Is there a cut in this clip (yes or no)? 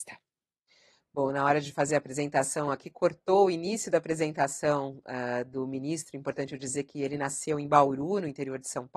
no